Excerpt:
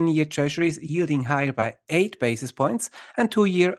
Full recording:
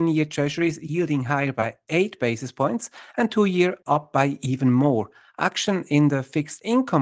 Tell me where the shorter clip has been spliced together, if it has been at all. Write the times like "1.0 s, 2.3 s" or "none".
none